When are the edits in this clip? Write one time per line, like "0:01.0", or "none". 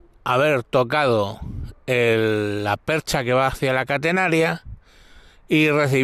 none